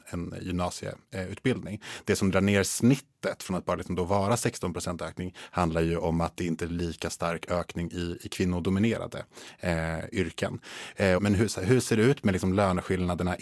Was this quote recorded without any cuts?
no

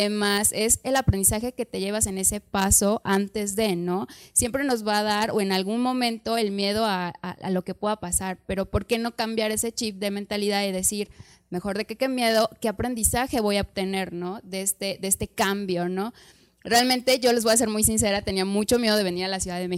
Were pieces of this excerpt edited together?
no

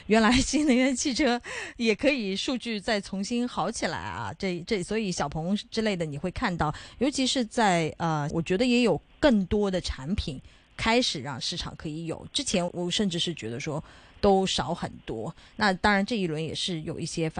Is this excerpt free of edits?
no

